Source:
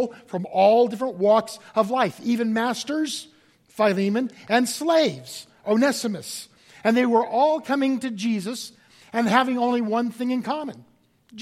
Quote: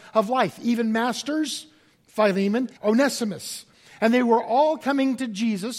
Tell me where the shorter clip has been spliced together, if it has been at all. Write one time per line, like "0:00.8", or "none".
0:02.8